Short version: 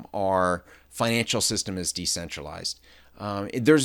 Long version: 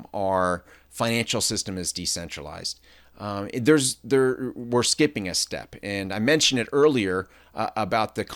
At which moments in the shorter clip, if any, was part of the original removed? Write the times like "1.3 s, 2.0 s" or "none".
none